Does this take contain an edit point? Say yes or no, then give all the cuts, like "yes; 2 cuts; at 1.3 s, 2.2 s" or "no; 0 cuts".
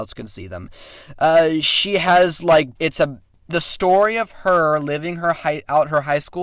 yes; 1 cut; at 2.8 s